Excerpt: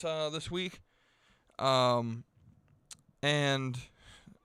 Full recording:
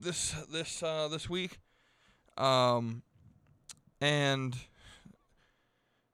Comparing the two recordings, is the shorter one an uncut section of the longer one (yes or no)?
yes